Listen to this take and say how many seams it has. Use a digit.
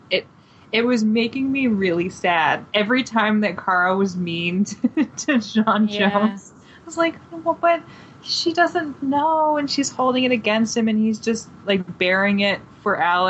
0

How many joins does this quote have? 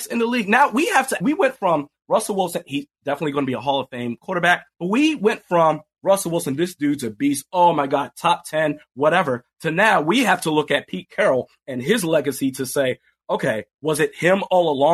2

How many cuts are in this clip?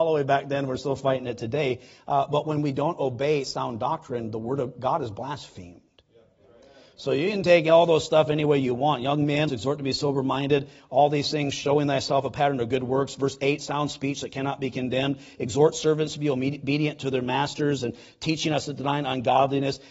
1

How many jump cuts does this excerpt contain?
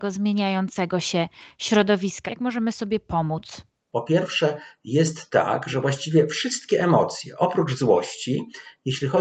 2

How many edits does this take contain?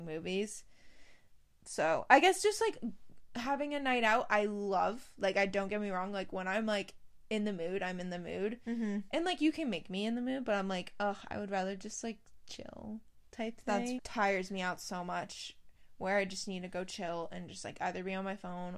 1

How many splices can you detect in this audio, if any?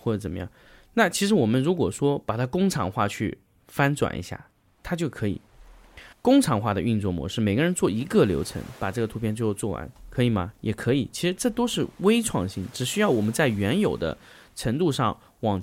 1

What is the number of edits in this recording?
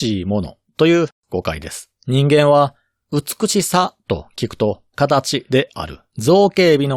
2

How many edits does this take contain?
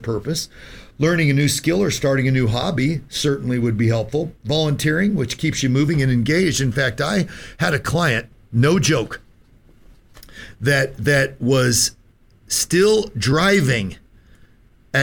0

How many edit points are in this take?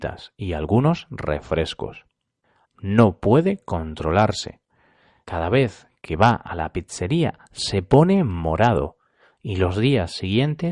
1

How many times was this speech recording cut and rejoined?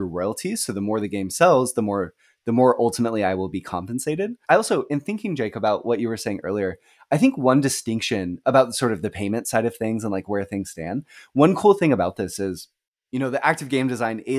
1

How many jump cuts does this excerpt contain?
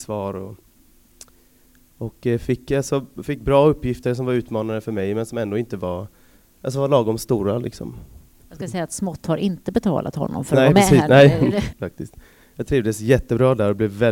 1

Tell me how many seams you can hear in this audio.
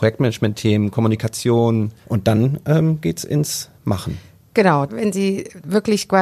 2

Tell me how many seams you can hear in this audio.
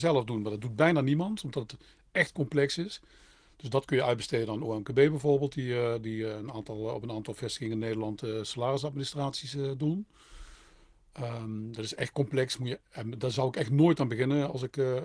0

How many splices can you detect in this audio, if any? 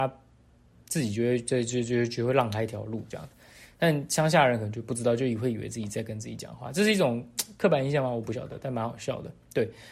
0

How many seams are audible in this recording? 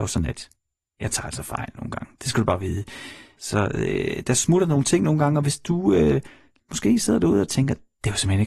1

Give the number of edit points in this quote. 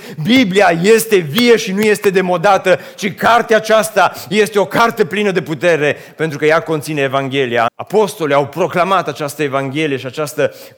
1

